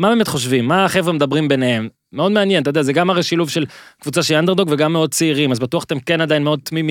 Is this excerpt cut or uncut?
uncut